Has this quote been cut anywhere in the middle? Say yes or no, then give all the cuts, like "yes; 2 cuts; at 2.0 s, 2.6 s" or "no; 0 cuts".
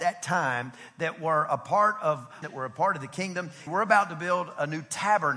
yes; 2 cuts; at 2.4 s, 3.7 s